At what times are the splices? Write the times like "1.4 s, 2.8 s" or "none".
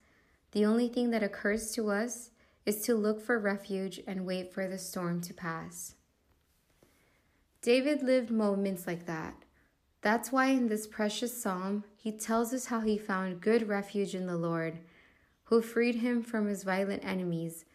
none